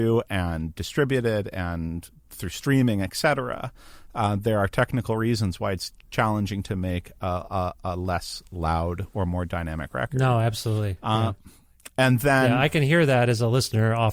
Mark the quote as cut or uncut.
uncut